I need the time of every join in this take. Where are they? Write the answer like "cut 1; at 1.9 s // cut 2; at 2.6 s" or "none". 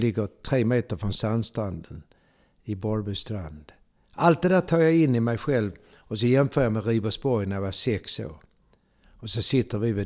cut 1; at 9.0 s